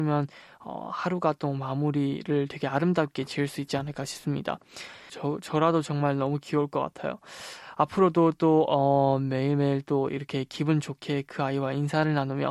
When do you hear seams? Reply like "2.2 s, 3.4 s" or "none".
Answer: 5.1 s